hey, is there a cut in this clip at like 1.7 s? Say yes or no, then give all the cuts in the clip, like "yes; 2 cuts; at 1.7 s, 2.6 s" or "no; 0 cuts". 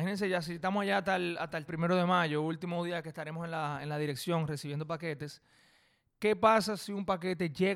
yes; 1 cut; at 1.7 s